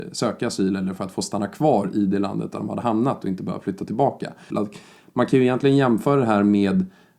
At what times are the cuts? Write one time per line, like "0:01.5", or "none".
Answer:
0:04.5